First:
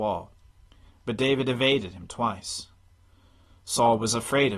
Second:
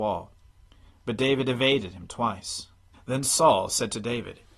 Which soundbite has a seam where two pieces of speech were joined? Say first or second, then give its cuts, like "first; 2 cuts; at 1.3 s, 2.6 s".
second; 1 cut; at 2.9 s